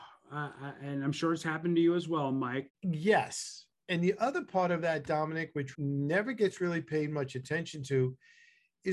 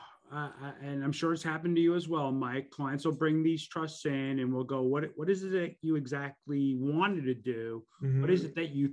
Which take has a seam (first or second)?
first